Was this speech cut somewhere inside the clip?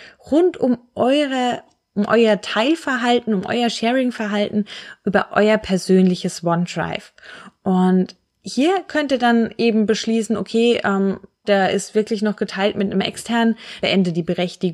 yes; 2 cuts; at 11.4 s, 13.8 s

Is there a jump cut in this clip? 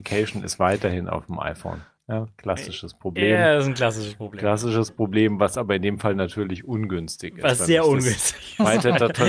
no; 0 cuts

